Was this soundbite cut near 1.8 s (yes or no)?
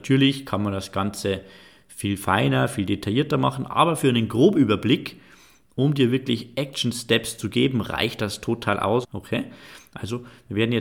no